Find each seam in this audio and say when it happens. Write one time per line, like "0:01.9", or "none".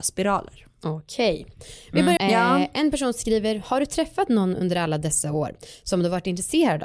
0:02.2